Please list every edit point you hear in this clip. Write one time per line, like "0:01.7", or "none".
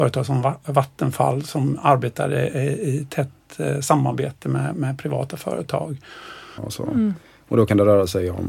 0:06.6